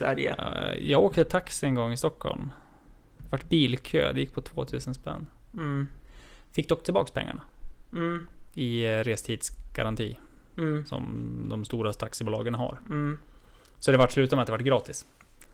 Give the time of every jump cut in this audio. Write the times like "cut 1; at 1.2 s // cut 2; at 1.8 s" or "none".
none